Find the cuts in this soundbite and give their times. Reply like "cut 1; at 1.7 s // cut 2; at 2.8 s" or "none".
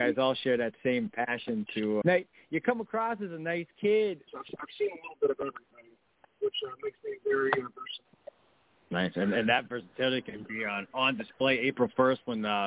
cut 1; at 2.0 s // cut 2; at 4.3 s